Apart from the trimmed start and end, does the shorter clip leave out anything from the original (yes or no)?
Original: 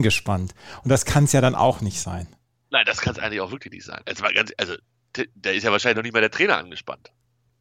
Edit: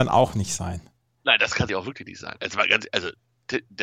yes